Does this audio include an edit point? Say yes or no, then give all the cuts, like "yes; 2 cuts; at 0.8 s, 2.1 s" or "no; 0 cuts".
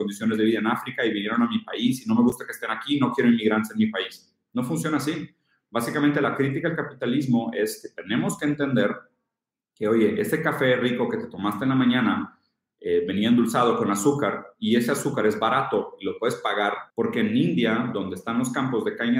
yes; 1 cut; at 16.9 s